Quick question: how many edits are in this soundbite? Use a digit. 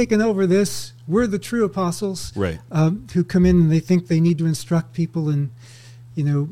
0